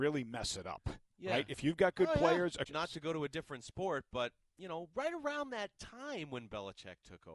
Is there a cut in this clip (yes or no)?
yes